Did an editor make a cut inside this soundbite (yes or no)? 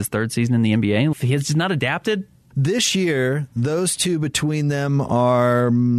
yes